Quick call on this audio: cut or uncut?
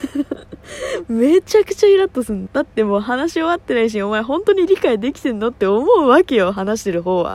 cut